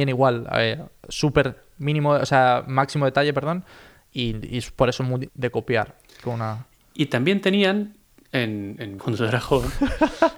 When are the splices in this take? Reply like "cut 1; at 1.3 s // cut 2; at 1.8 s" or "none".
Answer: cut 1; at 5.3 s // cut 2; at 9.0 s

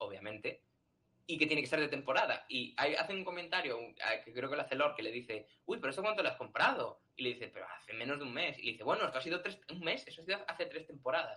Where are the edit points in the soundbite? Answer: none

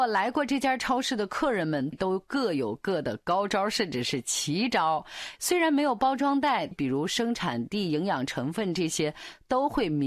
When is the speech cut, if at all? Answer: cut 1; at 1.9 s // cut 2; at 5.4 s // cut 3; at 6.7 s

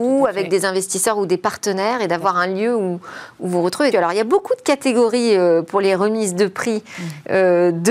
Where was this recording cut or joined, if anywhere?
cut 1; at 3.9 s

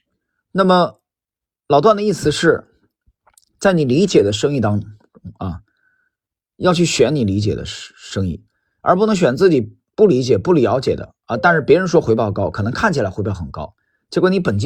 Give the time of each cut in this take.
none

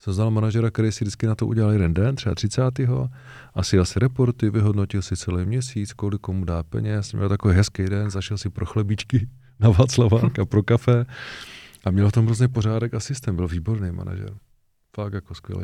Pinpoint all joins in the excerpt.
none

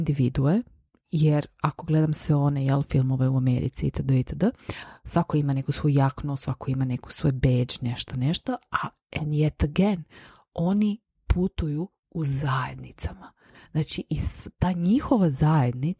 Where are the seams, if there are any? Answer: none

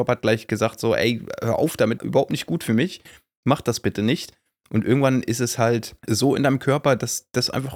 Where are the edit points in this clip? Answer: cut 1; at 2.0 s

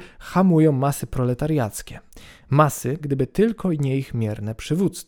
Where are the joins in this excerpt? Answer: cut 1; at 3.0 s

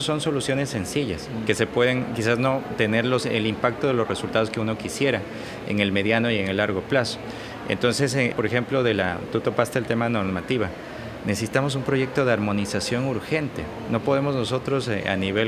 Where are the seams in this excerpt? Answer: cut 1; at 8.3 s

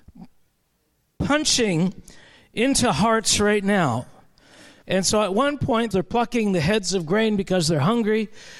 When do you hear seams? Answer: cut 1; at 4.8 s // cut 2; at 5.9 s

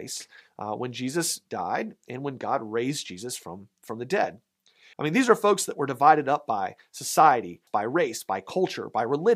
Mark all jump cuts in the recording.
cut 1; at 4.9 s // cut 2; at 7.7 s

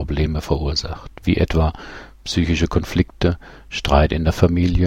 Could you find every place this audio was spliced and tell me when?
none

